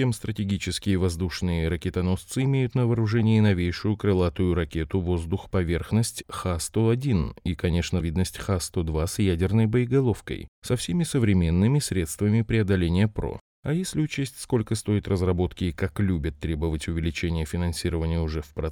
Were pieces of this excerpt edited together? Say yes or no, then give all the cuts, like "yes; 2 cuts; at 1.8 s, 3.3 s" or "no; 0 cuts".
yes; 2 cuts; at 8.0 s, 13.5 s